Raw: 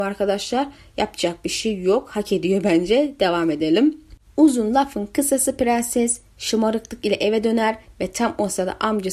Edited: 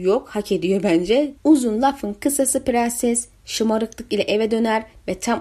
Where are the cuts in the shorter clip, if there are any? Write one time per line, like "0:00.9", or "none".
0:01.3